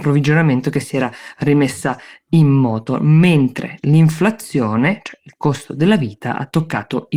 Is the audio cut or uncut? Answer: uncut